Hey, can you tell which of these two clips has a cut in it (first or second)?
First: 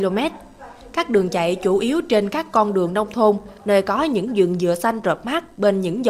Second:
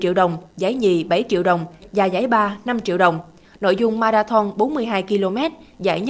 second